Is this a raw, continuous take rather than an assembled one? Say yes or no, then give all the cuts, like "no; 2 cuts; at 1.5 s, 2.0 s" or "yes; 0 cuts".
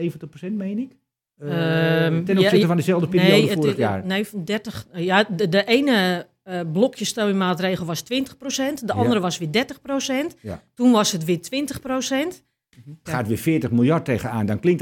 no; 1 cut; at 13.1 s